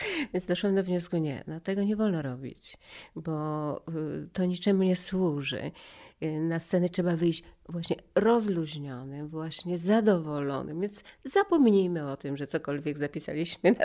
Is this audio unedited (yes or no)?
yes